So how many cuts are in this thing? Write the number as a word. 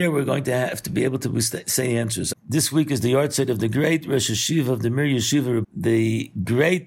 two